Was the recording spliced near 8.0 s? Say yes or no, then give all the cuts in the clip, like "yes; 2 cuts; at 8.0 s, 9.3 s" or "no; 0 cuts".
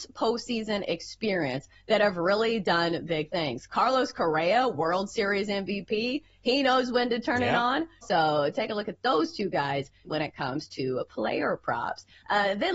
yes; 2 cuts; at 8.0 s, 10.0 s